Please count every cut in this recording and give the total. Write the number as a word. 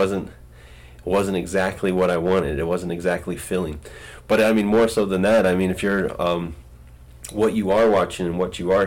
zero